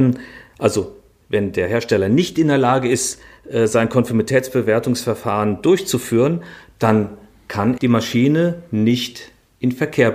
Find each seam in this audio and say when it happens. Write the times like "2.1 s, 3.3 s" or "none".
7.8 s